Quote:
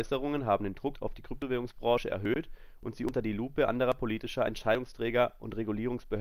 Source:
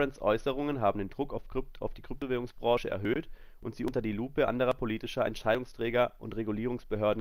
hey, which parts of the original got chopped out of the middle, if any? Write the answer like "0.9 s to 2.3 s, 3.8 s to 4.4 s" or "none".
1.3 s to 1.7 s